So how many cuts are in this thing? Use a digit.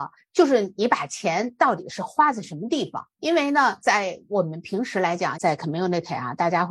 1